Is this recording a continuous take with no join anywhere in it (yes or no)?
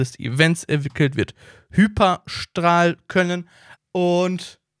no